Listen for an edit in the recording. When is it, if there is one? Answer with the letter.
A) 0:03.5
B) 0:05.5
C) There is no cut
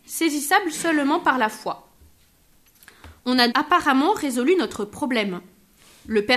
A